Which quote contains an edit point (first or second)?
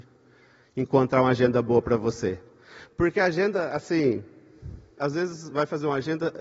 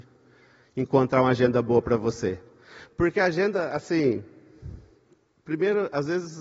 first